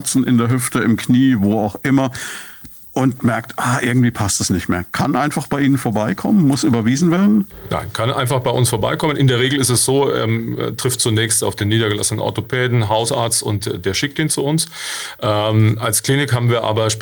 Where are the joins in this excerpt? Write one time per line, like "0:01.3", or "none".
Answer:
none